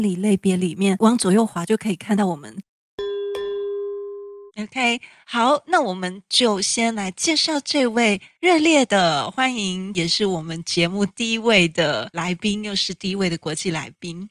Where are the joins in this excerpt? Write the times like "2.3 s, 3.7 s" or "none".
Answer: 4.5 s